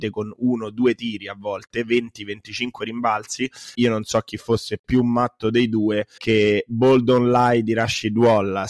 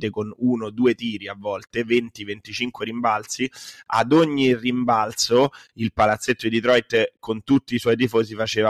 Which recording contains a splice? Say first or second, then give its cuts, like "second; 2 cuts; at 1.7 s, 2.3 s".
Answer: first; 2 cuts; at 3.7 s, 6.2 s